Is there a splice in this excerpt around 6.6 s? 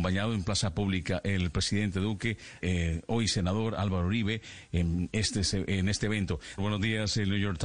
yes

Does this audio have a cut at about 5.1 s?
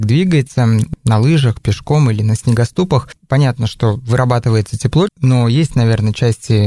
yes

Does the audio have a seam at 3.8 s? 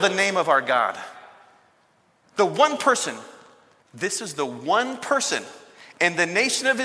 yes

